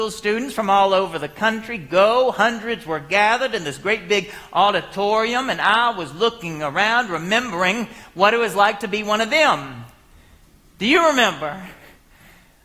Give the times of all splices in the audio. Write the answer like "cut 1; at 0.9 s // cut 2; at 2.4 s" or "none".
none